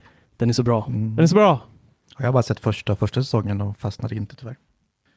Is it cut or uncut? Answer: uncut